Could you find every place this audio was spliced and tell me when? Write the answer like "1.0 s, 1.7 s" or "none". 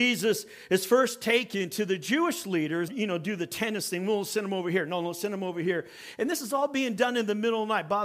2.9 s